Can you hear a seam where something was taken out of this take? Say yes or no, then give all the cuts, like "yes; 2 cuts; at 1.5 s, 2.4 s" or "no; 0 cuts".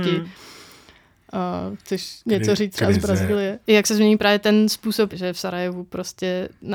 yes; 2 cuts; at 3.6 s, 5.1 s